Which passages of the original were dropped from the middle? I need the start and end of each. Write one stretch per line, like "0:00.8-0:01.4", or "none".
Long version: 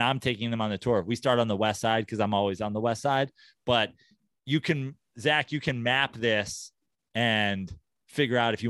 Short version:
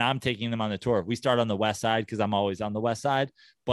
none